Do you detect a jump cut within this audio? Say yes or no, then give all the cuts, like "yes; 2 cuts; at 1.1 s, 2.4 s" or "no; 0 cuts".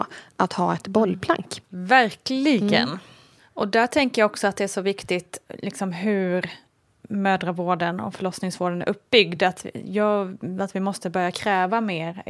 no; 0 cuts